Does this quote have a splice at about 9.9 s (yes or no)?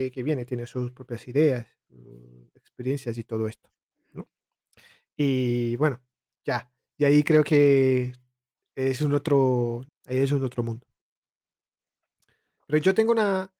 yes